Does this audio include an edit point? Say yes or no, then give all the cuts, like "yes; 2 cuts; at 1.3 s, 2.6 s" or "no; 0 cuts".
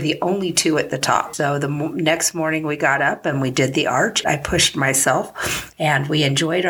yes; 3 cuts; at 1.3 s, 4.2 s, 5.7 s